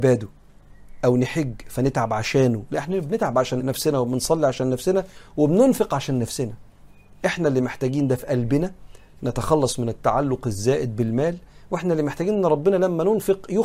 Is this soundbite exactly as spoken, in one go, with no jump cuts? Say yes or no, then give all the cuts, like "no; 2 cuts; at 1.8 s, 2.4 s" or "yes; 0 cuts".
no; 1 cut; at 3.6 s